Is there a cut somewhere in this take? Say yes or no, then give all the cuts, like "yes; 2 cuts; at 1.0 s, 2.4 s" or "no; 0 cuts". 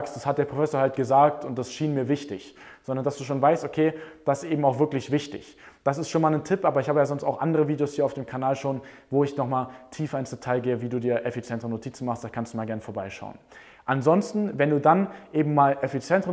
no; 0 cuts